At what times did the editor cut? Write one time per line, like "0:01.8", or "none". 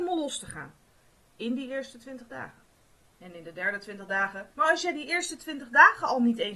0:03.1
0:04.5